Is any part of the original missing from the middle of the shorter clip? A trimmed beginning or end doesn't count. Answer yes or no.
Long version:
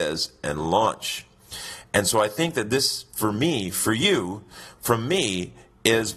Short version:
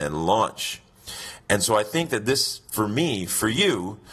no